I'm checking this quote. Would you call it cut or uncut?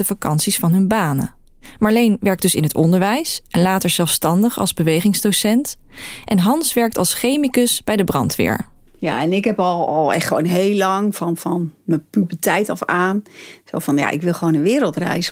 uncut